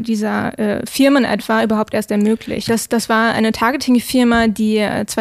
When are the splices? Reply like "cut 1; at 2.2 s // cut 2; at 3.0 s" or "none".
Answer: cut 1; at 2.7 s